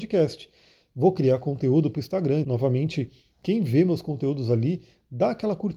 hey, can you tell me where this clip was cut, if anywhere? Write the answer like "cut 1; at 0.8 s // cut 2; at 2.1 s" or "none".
cut 1; at 2.4 s